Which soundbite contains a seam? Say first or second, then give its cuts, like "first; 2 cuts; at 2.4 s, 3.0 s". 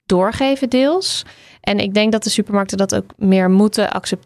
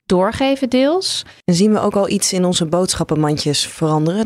second; 1 cut; at 1.4 s